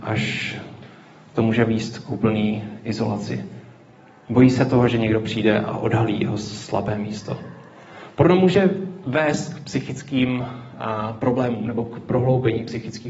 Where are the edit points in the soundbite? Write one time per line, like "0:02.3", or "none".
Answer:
none